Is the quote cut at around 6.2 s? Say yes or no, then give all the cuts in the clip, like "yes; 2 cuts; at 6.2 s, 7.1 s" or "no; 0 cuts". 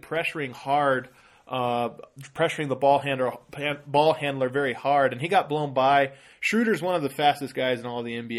no; 0 cuts